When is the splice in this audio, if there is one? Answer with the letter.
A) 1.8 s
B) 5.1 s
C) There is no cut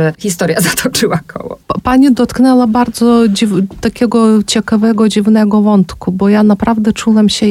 C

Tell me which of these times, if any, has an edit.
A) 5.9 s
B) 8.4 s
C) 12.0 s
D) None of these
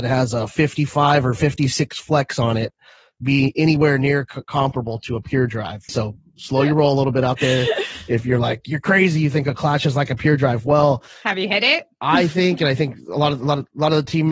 A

